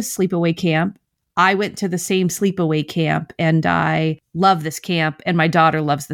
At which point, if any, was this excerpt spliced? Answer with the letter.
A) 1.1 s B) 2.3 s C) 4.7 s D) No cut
D